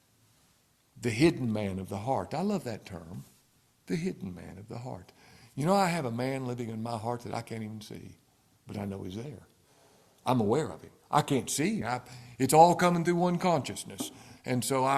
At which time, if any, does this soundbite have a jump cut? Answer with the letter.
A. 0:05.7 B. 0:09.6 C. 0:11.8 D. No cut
C